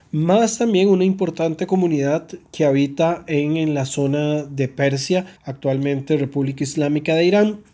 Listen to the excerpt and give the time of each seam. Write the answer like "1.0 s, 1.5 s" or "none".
5.4 s